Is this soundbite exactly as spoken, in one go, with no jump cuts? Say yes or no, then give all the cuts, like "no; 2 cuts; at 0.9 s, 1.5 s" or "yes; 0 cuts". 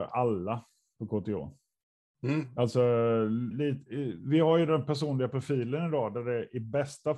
no; 1 cut; at 3.5 s